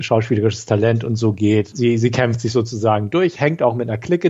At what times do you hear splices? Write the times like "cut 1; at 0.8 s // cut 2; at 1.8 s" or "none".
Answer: cut 1; at 1.7 s